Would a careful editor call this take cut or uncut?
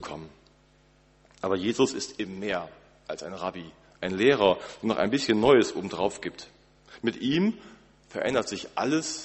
uncut